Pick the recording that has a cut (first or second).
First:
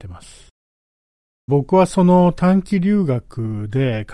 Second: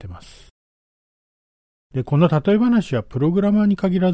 first